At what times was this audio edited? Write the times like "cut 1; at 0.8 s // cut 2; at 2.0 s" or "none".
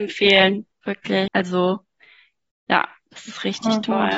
cut 1; at 1.3 s